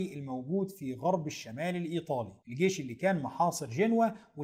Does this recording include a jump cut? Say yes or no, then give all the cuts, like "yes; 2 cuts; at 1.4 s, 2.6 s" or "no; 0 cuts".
yes; 1 cut; at 2.4 s